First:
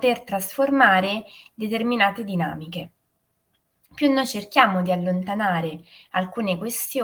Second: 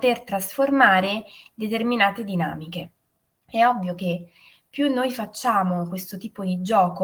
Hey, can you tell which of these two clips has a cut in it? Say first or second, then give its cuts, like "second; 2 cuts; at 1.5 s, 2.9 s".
second; 1 cut; at 3.3 s